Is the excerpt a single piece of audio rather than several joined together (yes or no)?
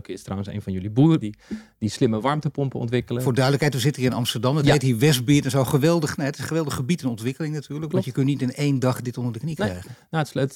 no